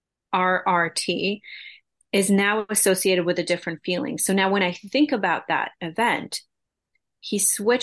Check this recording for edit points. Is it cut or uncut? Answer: uncut